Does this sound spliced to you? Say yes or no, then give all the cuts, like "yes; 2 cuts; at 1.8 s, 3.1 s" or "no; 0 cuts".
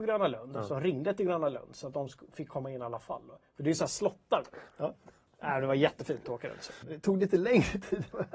yes; 2 cuts; at 4.7 s, 6.8 s